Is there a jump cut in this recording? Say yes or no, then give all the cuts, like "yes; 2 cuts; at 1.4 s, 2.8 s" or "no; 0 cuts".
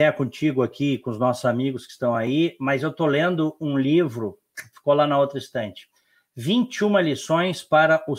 no; 0 cuts